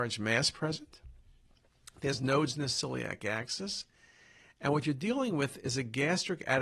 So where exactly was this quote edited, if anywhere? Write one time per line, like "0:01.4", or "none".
none